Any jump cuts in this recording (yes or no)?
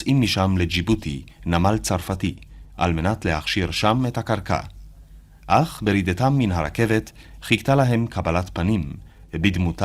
no